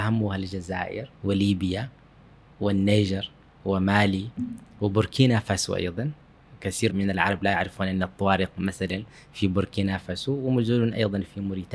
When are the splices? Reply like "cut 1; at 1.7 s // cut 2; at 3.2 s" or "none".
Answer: cut 1; at 1.1 s // cut 2; at 6.9 s